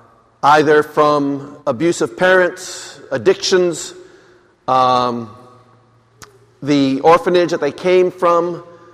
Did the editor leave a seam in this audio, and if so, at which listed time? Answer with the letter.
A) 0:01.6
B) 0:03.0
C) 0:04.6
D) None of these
A